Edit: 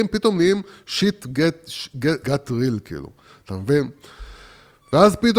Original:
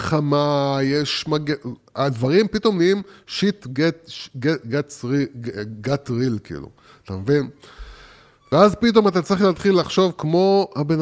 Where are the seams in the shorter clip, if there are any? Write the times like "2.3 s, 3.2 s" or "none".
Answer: 2.2 s